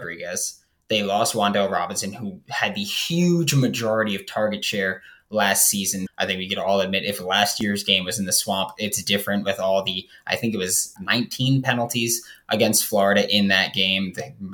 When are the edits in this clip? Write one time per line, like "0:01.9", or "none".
0:06.1
0:11.0